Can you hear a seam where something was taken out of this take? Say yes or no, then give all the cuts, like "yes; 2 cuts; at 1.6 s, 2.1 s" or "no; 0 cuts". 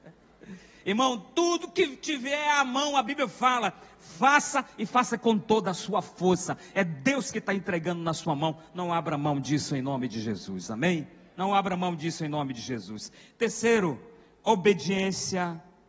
no; 0 cuts